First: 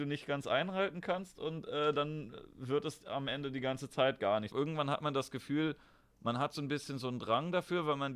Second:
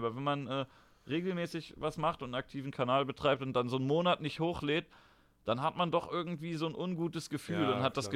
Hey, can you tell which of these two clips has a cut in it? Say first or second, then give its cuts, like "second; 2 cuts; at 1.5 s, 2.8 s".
first; 1 cut; at 4.5 s